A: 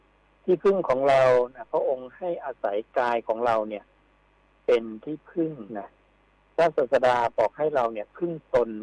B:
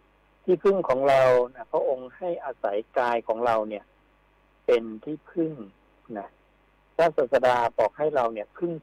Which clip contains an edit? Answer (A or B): A